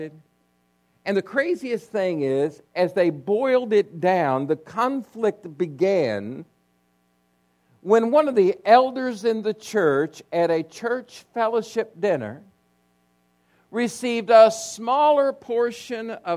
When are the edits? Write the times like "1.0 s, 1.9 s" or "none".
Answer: 2.7 s